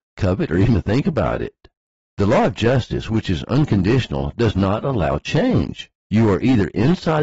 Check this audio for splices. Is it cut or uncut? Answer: uncut